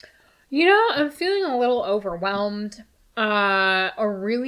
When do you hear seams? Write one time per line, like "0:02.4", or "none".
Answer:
0:03.0